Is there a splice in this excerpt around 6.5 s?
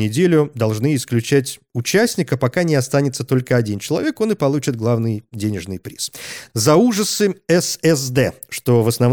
yes; 1 cut; at 6.5 s

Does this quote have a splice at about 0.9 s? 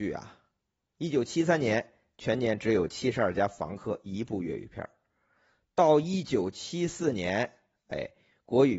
no; 0 cuts

